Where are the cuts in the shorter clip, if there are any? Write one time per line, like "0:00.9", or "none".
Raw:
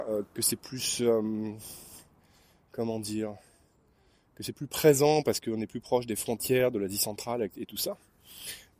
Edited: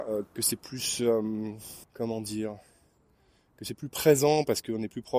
0:01.8